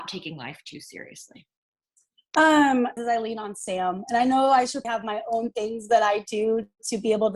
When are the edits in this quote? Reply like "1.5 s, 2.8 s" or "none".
3.0 s, 4.8 s